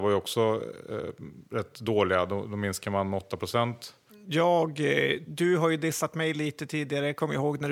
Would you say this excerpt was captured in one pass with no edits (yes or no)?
no